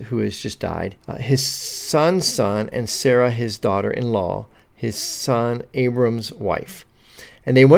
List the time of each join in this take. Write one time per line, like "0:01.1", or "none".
0:01.0